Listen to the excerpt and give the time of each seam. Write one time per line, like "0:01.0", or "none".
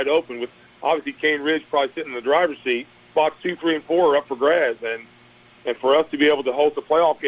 0:03.1